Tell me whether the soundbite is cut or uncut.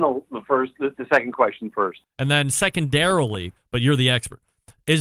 cut